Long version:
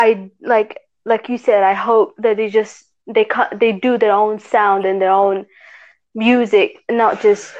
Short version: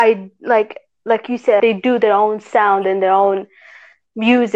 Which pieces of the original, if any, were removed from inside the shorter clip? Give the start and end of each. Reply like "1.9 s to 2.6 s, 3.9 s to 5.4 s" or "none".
1.6 s to 3.6 s